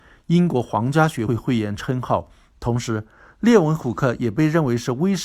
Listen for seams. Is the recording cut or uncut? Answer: cut